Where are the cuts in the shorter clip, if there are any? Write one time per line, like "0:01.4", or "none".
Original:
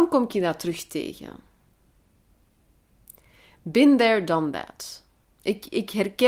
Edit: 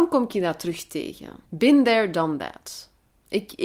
0:01.5